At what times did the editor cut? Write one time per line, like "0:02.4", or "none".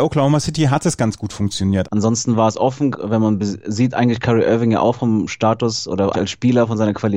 0:01.8
0:02.9
0:06.1